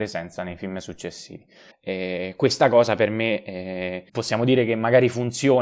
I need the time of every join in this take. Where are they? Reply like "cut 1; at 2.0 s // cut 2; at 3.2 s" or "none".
cut 1; at 1.7 s // cut 2; at 4.1 s